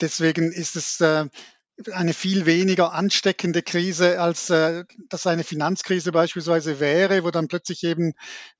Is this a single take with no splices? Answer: yes; 0 cuts

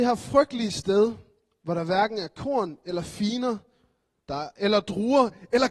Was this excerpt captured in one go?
yes; 0 cuts

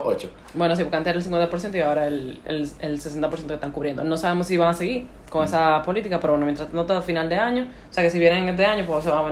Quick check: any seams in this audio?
no; 0 cuts

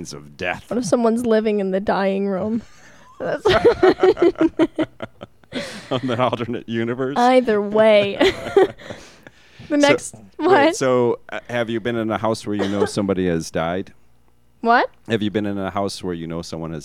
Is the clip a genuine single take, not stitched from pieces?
yes; 0 cuts

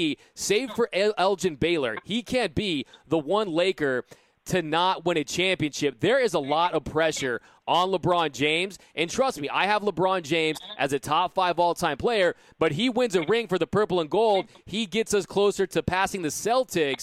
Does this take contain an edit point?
no; 0 cuts

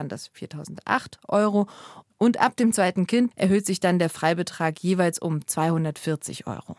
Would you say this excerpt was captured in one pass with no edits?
no; 1 cut; at 3.3 s

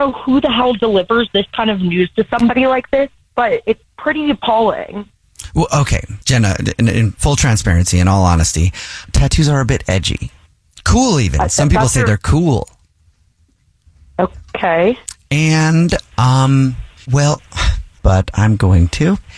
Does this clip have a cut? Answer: yes; 1 cut; at 18.0 s

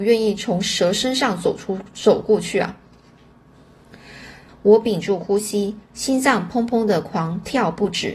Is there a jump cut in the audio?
yes; 1 cut; at 4.5 s

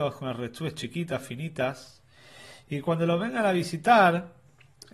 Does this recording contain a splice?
no; 0 cuts

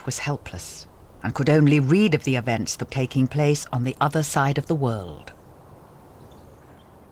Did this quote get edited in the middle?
yes; 1 cut; at 2.9 s

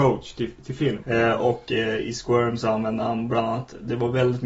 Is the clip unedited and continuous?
no; 1 cut; at 1.0 s

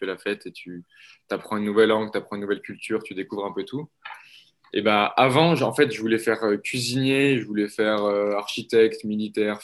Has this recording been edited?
no; 0 cuts

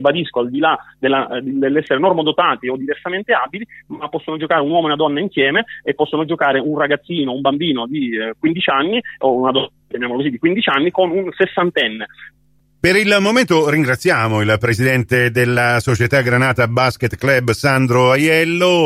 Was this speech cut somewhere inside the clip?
yes; 1 cut; at 9.8 s

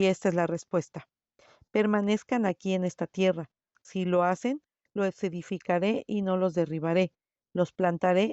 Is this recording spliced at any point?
no; 0 cuts

